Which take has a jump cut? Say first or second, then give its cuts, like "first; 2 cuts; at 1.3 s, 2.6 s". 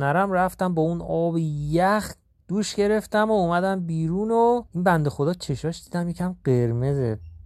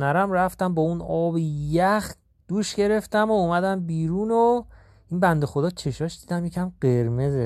first; 1 cut; at 4.7 s